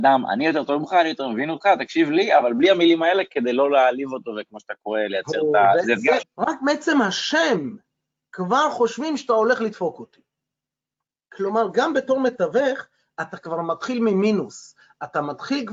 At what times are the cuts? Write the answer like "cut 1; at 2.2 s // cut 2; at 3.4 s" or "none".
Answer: cut 1; at 6.2 s